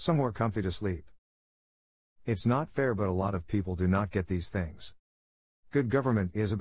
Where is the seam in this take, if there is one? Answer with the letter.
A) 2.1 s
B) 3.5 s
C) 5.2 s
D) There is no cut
A